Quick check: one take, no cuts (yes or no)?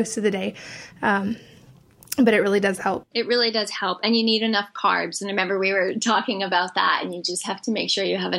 no